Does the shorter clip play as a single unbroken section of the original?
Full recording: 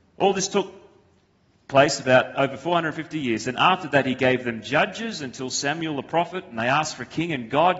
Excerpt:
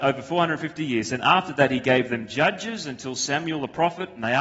yes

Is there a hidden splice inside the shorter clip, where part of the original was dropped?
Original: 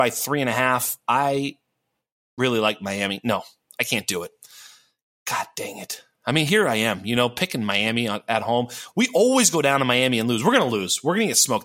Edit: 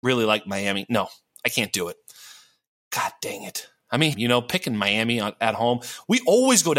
yes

